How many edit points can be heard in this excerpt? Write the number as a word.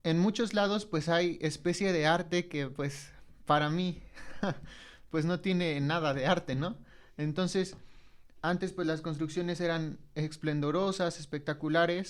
one